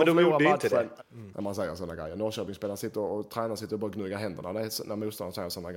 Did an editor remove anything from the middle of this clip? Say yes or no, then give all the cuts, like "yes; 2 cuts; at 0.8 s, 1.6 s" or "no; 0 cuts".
yes; 1 cut; at 1.0 s